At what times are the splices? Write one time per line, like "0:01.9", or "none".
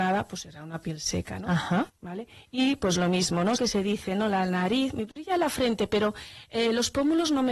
0:01.9
0:03.6